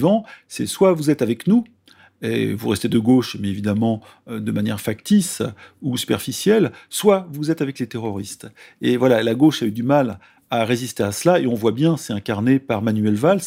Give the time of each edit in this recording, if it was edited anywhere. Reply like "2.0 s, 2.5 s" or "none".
none